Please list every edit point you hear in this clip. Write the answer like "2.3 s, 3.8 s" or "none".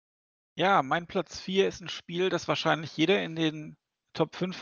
none

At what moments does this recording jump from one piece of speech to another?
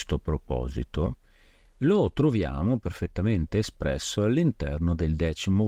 none

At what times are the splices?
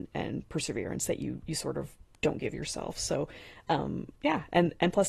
4.2 s

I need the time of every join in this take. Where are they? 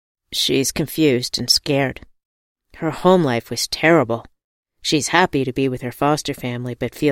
none

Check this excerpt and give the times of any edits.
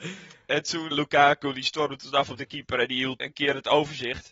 0.9 s, 3.2 s

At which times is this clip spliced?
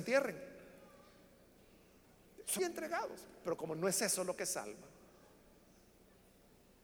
2.6 s

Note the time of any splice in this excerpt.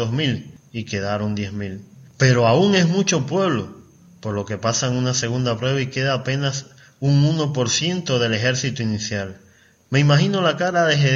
9.8 s

